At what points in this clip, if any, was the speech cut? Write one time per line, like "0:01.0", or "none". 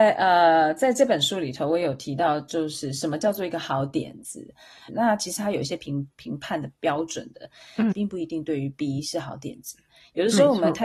0:04.9
0:07.9

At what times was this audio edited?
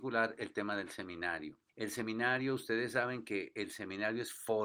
0:01.7

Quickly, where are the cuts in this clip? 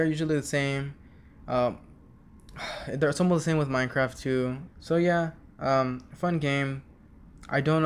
0:04.7

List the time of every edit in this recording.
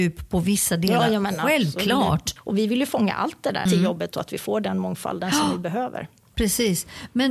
0:02.4
0:03.7

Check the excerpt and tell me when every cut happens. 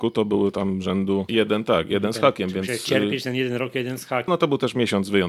0:01.3
0:04.3

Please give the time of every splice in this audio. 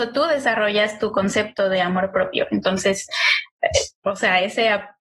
none

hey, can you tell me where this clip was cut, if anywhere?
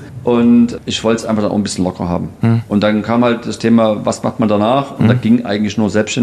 none

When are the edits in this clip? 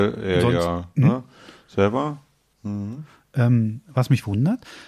0:02.5

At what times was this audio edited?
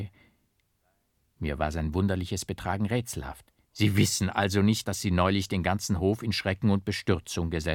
0:03.6
0:04.8

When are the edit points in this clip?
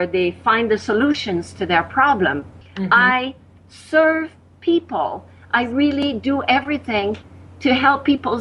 0:02.6

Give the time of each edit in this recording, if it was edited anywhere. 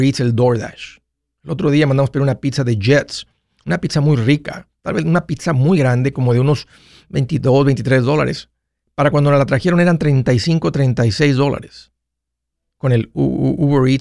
none

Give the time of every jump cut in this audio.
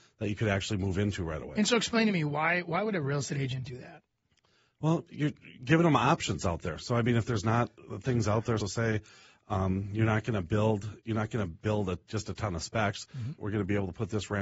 0:08.6
0:13.4

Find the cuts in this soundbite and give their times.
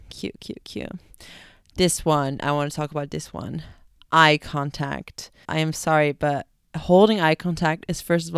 0:05.4

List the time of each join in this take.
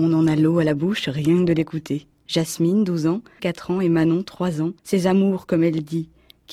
0:02.2
0:03.4
0:04.8

